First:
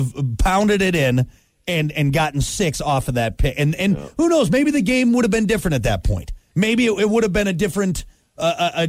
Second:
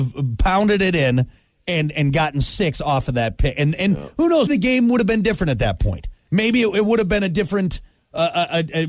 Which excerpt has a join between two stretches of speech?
second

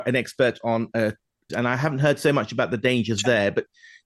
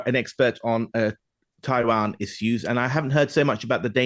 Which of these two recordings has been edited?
first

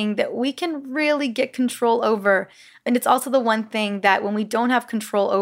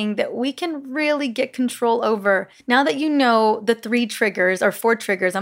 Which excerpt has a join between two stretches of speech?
second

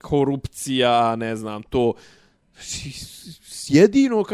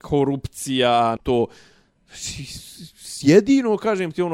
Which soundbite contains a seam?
second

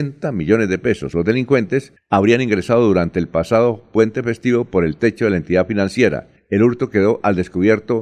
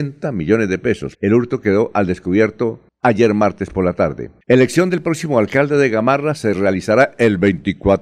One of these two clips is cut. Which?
second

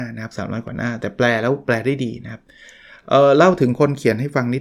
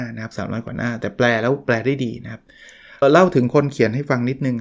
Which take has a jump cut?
second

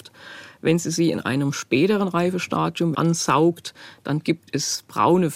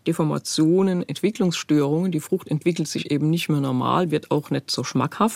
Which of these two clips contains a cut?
first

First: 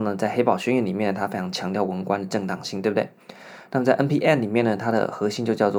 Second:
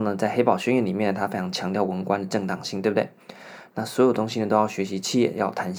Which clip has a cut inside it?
second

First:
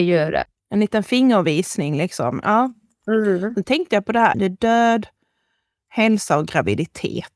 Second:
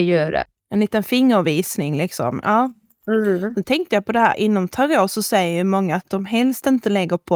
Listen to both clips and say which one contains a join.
first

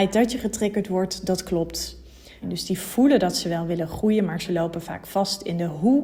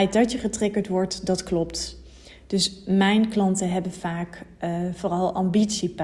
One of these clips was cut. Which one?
first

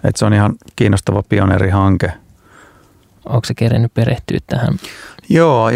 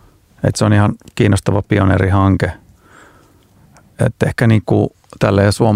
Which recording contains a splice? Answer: first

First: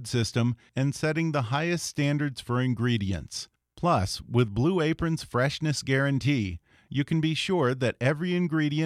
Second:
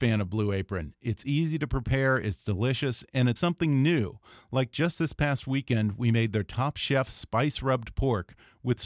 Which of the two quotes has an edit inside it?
second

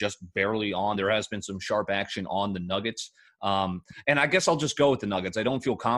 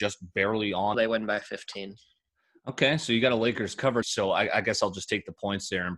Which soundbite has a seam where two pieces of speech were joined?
second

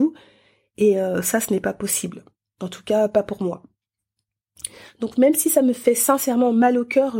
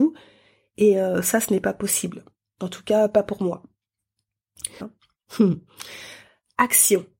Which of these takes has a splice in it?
second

